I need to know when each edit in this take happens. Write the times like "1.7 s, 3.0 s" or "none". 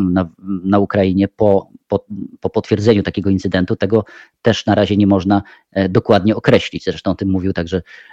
none